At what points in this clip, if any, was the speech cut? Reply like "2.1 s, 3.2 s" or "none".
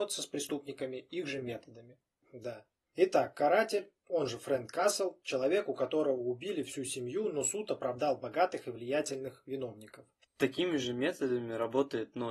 2.2 s, 10.2 s

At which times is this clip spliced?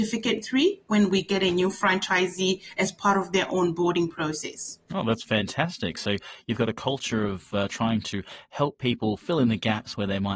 none

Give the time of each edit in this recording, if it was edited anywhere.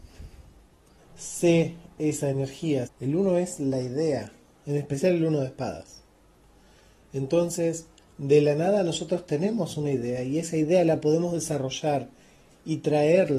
1.0 s, 2.9 s

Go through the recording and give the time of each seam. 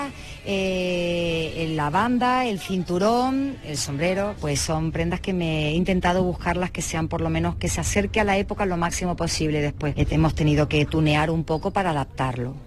4.4 s, 10.0 s

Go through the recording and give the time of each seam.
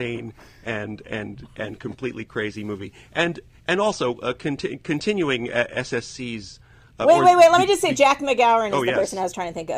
none

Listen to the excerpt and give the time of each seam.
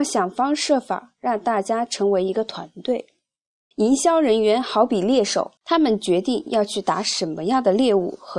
3.7 s, 5.6 s

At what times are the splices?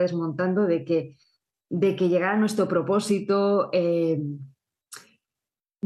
none

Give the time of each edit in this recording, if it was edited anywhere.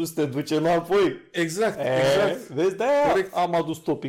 none

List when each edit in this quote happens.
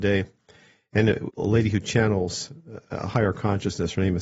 1.3 s

